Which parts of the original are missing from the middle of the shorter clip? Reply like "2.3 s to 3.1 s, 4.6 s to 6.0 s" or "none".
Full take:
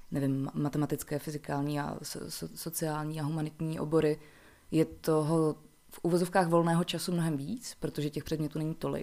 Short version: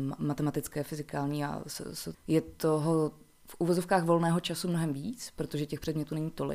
2.5 s to 4.6 s